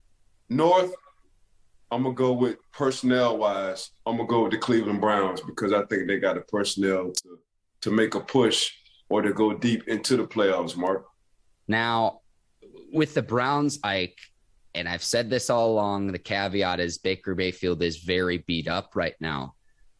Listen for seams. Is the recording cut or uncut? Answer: cut